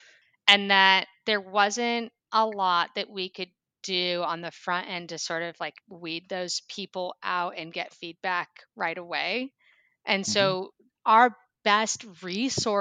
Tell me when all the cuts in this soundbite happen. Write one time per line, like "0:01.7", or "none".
0:05.8